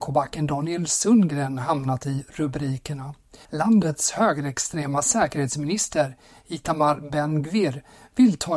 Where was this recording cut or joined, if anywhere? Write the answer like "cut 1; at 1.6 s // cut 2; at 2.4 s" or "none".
cut 1; at 3.5 s